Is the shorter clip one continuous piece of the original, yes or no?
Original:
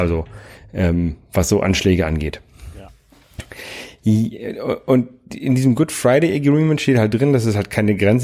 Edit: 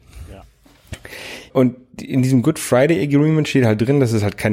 no